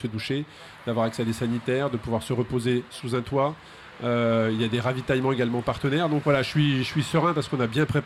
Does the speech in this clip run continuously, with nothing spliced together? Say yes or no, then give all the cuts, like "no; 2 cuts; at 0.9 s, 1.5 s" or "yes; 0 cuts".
no; 1 cut; at 6.2 s